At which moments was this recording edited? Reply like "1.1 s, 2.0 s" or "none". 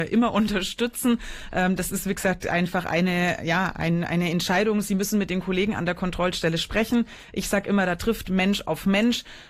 none